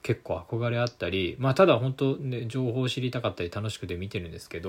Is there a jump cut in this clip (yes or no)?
no